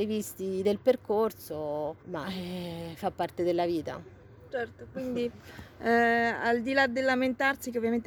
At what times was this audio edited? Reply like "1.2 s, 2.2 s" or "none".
2.0 s